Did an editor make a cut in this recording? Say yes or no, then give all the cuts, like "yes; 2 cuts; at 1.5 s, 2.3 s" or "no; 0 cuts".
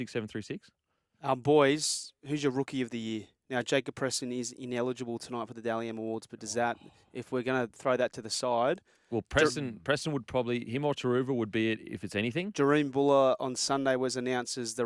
no; 0 cuts